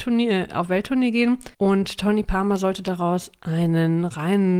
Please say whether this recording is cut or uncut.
cut